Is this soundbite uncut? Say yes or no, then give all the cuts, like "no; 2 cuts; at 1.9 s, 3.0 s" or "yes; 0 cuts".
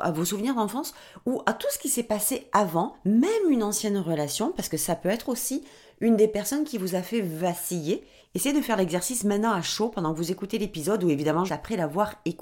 no; 2 cuts; at 8.2 s, 11.5 s